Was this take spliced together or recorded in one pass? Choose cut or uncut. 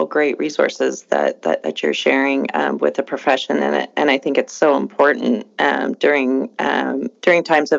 uncut